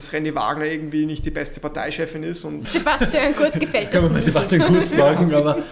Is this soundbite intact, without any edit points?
no; 1 cut; at 2.6 s

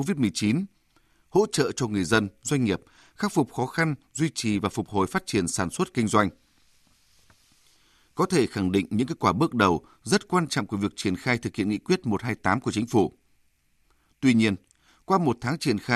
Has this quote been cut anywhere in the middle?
no; 0 cuts

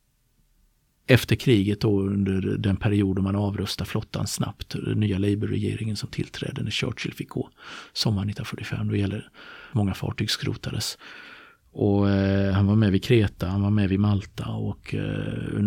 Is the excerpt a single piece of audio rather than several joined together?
no; 2 cuts; at 9.7 s, 11.6 s

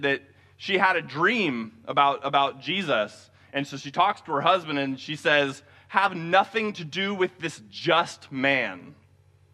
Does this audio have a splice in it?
no; 0 cuts

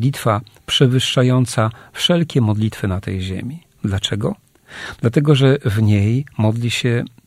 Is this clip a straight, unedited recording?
yes; 0 cuts

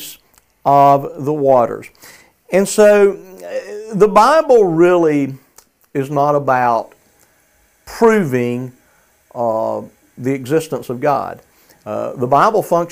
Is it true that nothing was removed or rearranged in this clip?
yes; 0 cuts

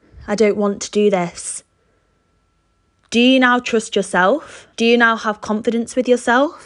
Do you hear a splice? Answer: yes; 1 cut; at 4.7 s

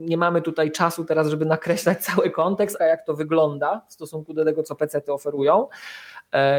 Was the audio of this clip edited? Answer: yes; 1 cut; at 2.8 s

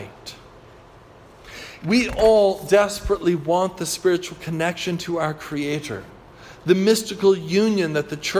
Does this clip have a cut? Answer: yes; 1 cut; at 1.8 s

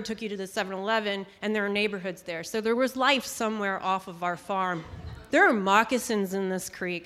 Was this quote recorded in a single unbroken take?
no; 1 cut; at 5.3 s

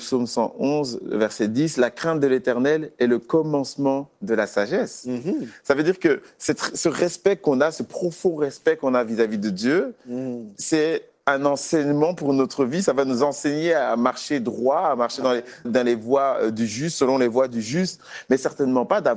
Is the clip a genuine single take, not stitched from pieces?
no; 1 cut; at 15.6 s

